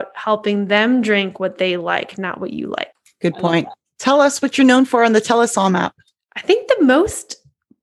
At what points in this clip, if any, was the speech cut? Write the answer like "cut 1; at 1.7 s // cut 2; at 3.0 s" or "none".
none